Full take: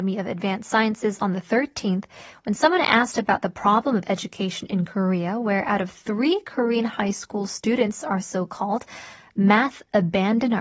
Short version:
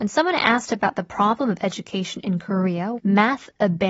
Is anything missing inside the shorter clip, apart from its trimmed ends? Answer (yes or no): yes